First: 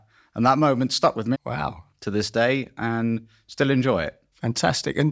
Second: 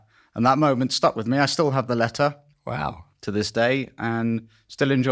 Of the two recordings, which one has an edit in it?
first; 1 cut; at 1.3 s

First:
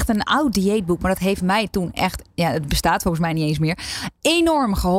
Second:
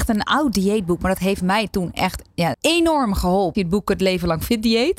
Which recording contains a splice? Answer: second; 2 cuts; at 2.5 s, 3.5 s

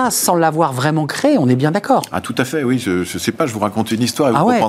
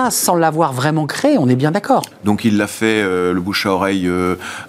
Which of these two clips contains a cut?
second; 1 cut; at 2.1 s

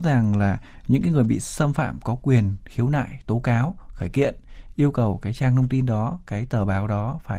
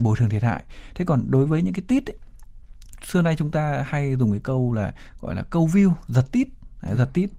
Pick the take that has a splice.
second; 1 cut; at 3.0 s

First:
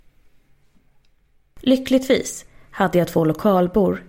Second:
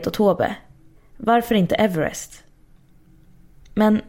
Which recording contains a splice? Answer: second; 1 cut; at 1.0 s

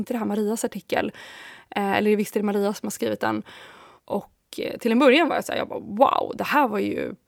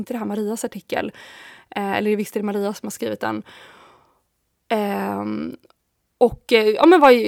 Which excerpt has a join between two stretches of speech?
first; 1 cut; at 4.0 s

